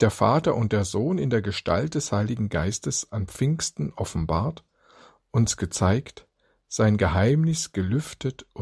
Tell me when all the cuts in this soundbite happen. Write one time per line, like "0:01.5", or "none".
none